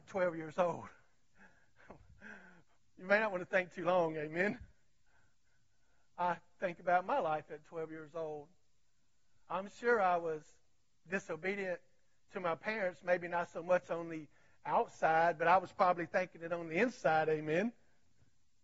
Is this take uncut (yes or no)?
yes